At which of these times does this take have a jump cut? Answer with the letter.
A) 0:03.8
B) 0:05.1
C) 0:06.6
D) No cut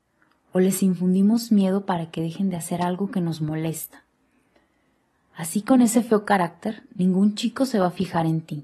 B